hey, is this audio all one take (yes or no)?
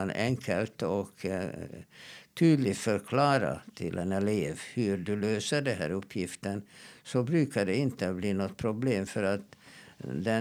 yes